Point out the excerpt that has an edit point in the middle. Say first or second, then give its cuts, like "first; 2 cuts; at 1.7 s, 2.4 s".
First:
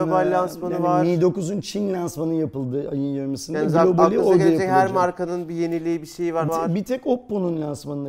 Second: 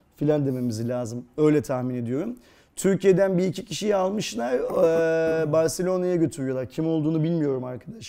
first; 1 cut; at 6.5 s